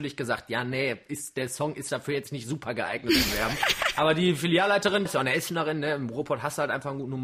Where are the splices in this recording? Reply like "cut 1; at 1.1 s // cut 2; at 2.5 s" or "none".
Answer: cut 1; at 5.1 s